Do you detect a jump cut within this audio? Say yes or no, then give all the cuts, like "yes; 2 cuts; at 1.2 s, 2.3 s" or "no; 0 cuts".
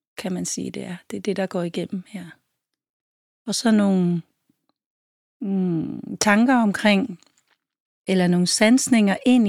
no; 0 cuts